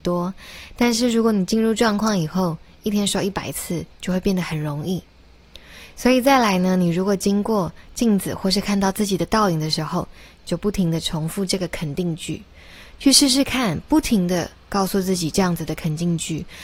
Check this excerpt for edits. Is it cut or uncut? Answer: uncut